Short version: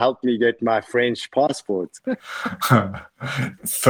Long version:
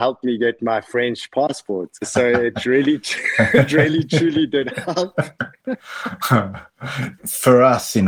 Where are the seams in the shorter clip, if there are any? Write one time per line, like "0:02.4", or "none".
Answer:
0:02.0

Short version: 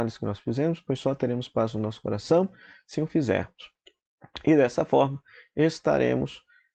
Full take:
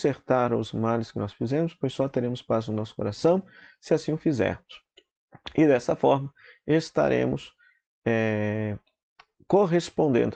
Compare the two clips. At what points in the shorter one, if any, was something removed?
0:02.9

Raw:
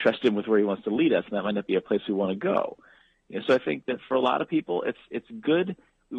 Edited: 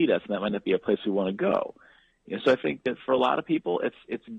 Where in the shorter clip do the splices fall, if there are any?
none

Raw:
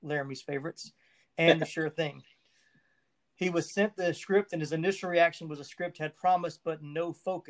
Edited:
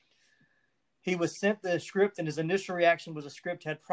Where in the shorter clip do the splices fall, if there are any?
none

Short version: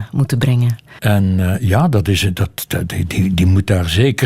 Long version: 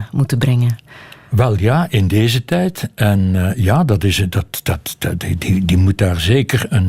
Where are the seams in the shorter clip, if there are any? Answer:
0:01.0
0:02.7

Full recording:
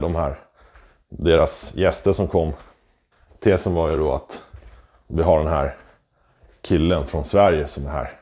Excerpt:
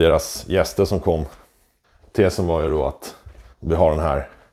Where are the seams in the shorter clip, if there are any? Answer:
0:03.5

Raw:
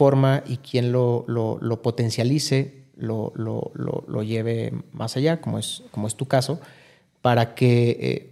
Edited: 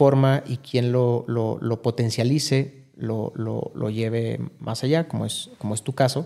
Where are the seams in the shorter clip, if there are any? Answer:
0:03.7

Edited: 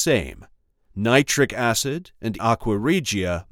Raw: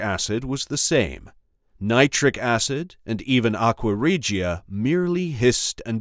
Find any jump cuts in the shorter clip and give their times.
0:02.4

